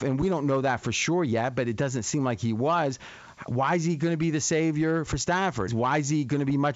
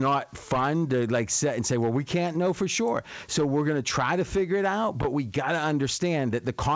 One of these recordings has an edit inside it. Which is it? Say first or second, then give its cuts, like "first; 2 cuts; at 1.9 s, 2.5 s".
first; 1 cut; at 5.7 s